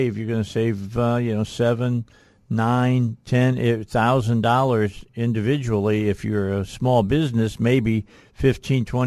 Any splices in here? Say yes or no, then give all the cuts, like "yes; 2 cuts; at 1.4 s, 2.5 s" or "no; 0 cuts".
no; 0 cuts